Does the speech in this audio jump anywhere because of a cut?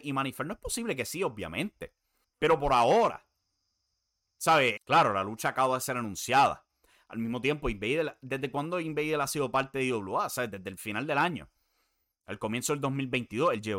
yes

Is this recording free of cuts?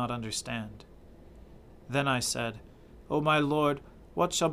yes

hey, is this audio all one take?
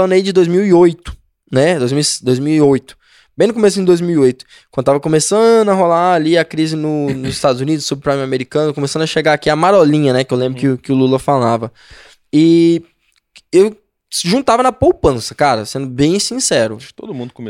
yes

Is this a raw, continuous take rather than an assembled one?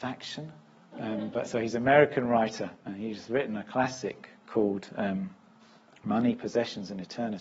no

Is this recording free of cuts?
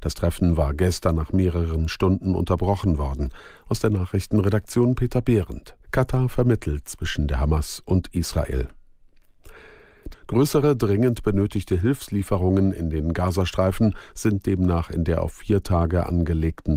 no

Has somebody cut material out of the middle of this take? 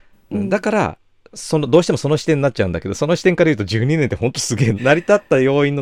yes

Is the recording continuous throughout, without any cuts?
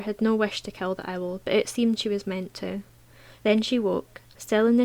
no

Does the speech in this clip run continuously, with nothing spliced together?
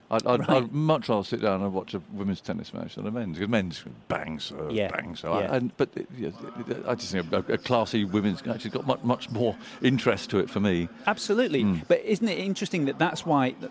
yes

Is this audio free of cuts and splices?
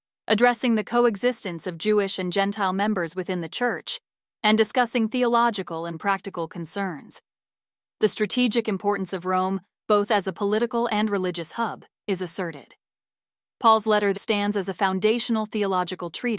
no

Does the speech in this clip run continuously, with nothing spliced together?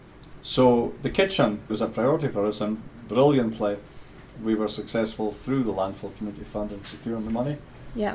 no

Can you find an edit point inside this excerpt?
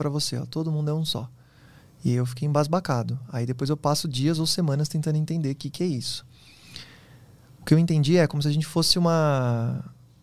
no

